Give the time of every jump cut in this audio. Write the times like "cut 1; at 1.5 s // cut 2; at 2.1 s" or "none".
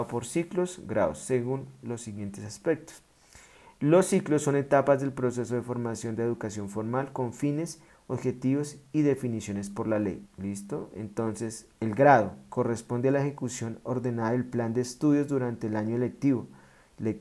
cut 1; at 10.3 s